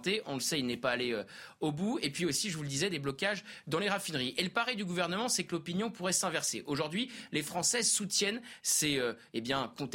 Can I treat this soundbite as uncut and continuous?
yes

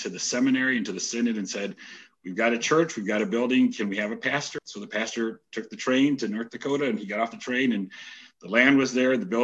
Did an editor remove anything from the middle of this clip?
yes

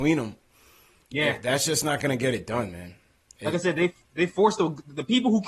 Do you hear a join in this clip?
no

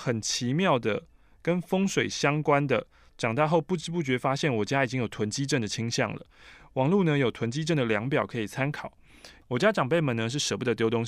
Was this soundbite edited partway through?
yes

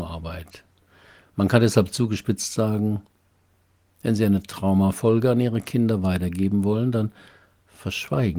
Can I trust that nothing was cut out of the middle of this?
yes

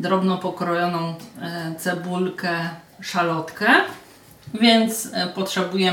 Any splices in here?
no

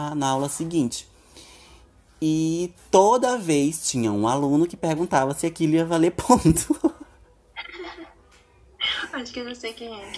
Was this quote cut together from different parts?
no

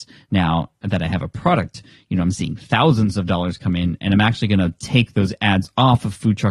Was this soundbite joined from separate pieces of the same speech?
no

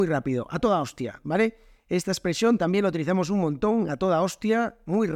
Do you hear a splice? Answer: no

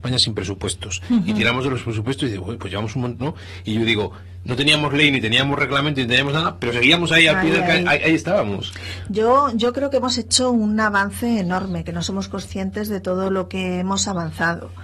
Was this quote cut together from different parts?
yes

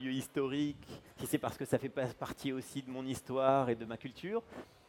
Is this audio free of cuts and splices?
yes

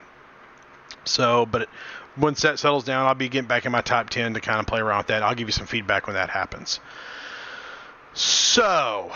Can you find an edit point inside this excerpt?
no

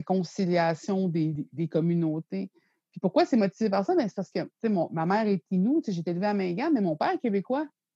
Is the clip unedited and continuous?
yes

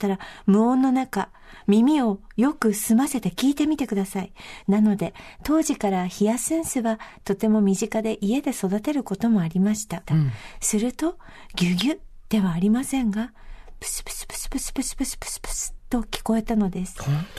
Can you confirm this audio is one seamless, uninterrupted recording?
no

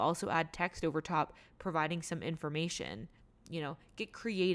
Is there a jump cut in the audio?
no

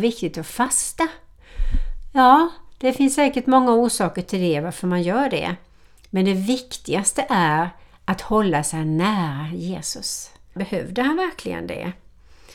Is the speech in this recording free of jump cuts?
no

